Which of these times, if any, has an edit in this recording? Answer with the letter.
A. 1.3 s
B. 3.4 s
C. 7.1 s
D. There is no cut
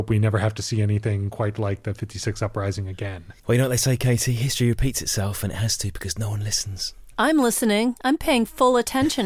B